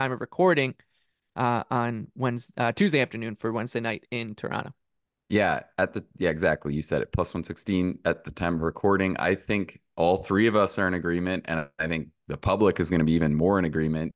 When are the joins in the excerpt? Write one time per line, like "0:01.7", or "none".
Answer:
none